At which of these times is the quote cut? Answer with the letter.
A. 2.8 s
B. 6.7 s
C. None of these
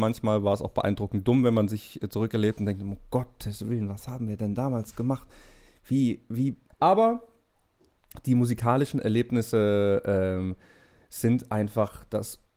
B